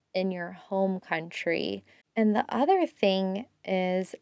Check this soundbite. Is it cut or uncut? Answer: cut